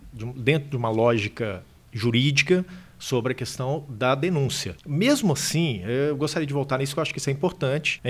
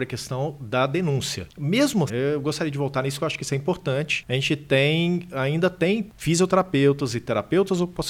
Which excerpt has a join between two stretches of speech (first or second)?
second